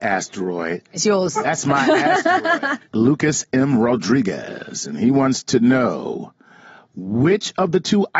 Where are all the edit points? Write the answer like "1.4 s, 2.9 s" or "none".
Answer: 2.8 s